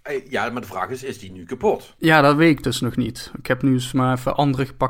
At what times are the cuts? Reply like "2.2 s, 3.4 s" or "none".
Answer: none

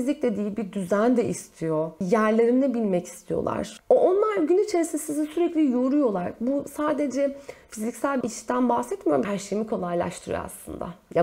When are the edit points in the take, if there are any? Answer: 8.2 s, 9.2 s

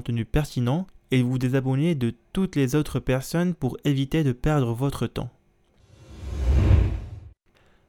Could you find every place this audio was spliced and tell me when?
none

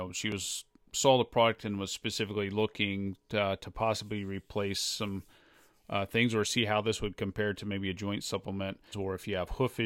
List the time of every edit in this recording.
8.9 s

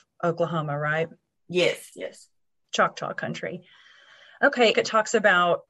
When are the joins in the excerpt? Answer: 1.9 s, 4.7 s

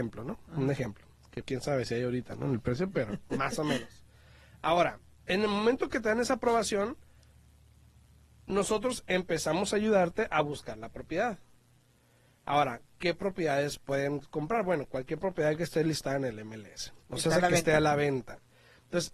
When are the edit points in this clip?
1.4 s

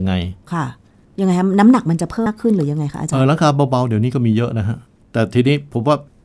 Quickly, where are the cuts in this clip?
2.3 s

